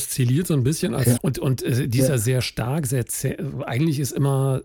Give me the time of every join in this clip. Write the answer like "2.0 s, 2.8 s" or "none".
1.2 s